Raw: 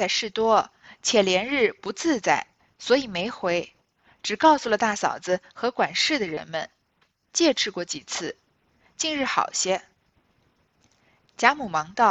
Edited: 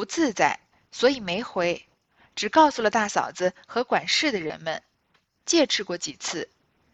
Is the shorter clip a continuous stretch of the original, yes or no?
yes